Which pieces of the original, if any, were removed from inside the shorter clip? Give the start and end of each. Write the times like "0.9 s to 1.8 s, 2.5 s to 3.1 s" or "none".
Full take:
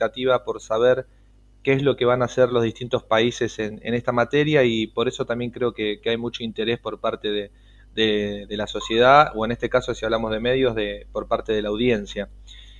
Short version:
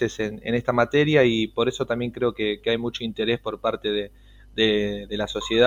none